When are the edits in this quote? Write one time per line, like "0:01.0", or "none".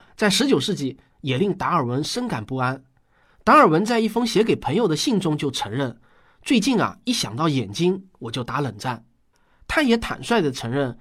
0:01.1